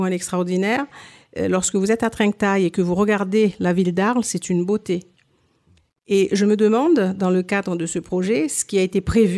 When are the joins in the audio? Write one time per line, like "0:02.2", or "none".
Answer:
none